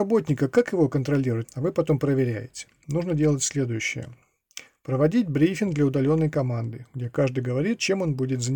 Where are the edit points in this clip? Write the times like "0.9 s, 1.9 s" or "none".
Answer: 1.4 s, 2.8 s